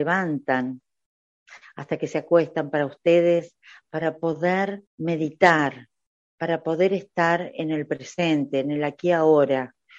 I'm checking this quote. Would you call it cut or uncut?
cut